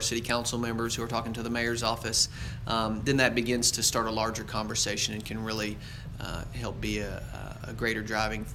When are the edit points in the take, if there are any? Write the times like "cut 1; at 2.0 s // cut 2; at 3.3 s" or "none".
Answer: none